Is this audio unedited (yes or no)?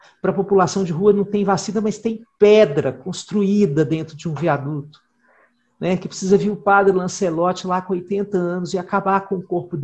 yes